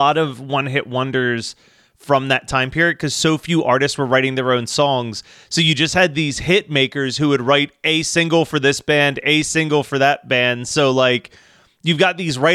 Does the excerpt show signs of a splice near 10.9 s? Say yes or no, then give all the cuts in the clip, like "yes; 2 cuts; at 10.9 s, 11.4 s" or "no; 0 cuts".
no; 0 cuts